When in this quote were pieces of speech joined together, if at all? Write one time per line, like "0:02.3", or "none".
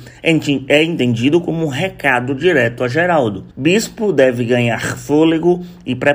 0:03.5